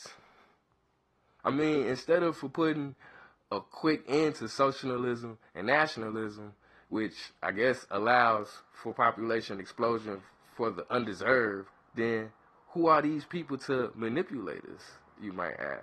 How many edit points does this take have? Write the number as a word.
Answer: two